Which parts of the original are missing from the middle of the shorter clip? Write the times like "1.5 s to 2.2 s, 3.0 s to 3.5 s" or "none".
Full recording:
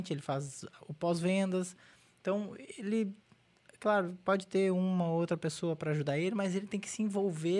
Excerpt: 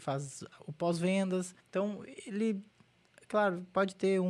1.8 s to 2.1 s

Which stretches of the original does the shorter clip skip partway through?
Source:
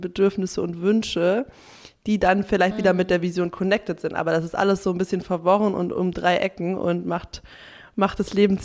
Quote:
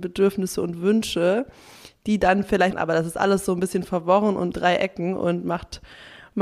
2.7 s to 4.1 s, 5.9 s to 6.1 s

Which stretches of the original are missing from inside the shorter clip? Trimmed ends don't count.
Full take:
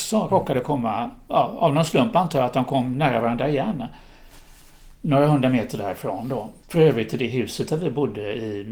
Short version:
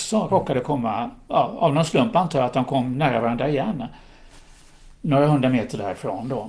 none

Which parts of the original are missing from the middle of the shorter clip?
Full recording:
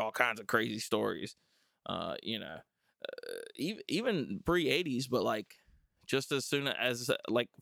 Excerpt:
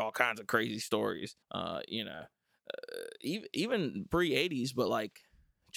1.4 s to 1.8 s

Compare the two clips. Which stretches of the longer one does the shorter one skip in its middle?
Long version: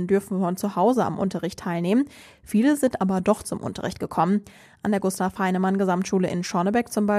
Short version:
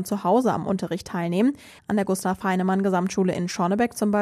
2.3 s to 4.7 s

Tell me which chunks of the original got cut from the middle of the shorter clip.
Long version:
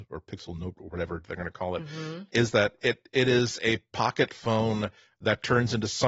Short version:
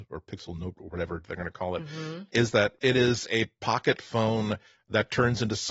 2.8 s to 3.1 s

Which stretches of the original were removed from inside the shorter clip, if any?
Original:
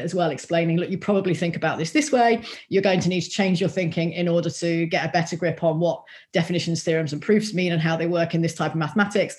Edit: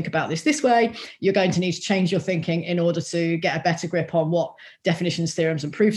none

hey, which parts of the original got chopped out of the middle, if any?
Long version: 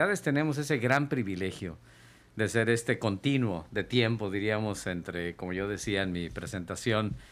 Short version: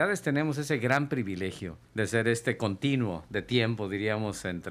1.8 s to 2.3 s

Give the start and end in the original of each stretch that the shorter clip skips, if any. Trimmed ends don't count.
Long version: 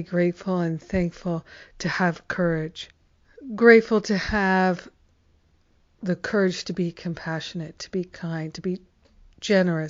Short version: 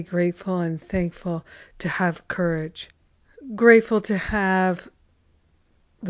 none

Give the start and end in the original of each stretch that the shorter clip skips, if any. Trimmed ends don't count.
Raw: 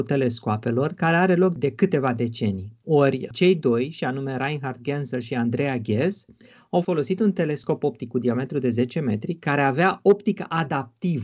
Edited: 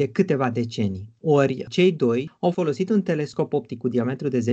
3.9 s to 6.6 s

